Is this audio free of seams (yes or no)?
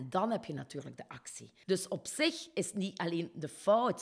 no